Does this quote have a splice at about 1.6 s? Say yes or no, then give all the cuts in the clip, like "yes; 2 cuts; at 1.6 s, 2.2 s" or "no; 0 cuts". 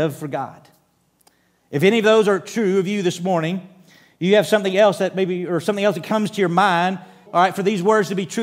no; 1 cut; at 7.3 s